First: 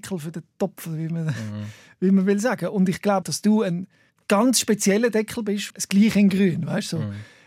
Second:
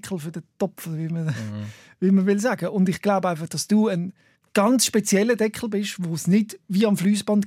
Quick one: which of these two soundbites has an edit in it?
first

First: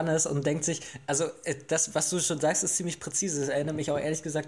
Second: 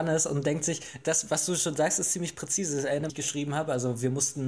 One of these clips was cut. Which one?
second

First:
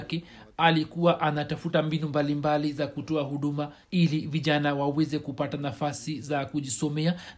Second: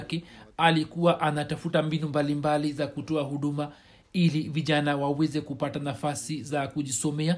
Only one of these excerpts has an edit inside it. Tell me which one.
first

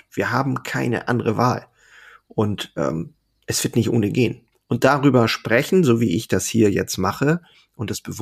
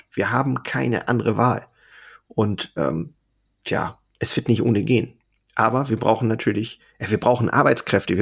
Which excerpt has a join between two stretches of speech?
first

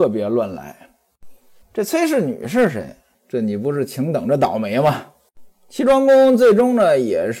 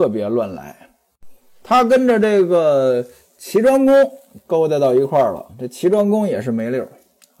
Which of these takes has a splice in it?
first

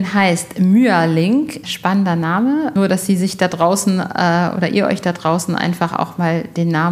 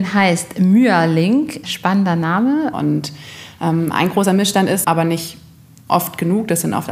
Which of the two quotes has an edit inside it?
second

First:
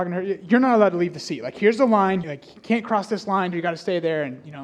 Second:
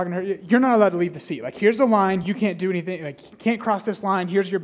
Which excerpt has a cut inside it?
first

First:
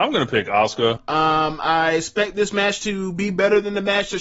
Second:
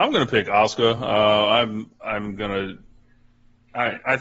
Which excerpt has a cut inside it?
first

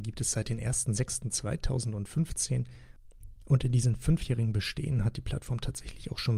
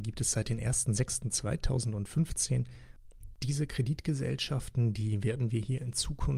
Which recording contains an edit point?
second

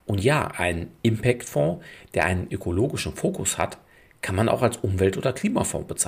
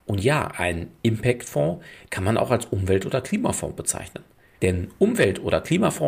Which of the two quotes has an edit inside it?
second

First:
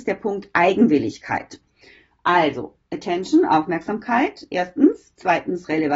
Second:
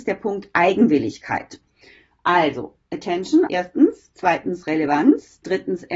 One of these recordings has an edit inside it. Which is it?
second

